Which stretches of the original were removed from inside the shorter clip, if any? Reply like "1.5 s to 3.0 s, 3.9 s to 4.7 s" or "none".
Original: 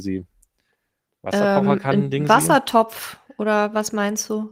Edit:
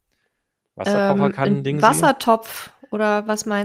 none